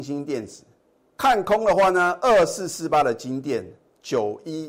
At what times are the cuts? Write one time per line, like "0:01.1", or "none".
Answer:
0:01.0